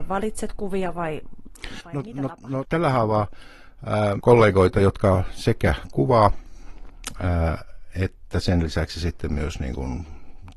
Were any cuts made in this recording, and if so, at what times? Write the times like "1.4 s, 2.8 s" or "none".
2.6 s, 4.2 s